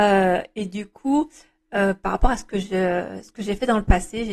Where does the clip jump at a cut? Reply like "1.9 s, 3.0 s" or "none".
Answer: none